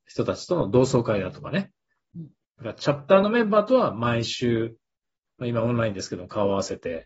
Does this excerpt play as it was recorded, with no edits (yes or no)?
no